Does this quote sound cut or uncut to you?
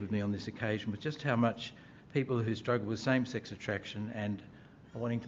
uncut